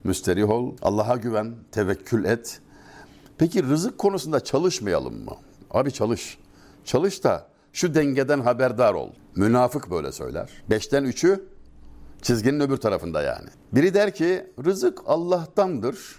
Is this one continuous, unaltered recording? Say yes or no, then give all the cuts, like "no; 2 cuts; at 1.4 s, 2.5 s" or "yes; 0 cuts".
no; 2 cuts; at 9.2 s, 13.5 s